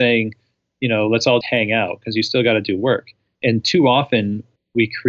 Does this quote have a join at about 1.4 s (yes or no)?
yes